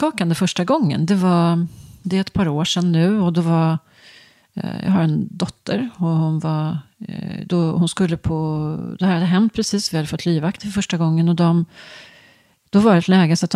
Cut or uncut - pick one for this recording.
uncut